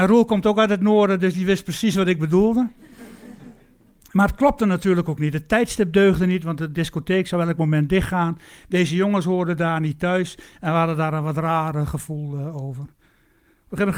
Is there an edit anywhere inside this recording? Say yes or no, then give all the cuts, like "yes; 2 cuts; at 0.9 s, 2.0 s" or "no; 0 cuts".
no; 0 cuts